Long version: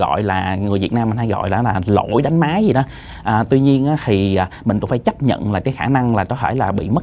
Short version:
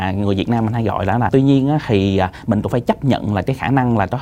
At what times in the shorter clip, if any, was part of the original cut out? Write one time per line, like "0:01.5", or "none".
0:01.3